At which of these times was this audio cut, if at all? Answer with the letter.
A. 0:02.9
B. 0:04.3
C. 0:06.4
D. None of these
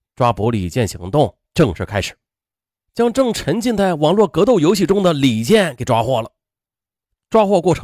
A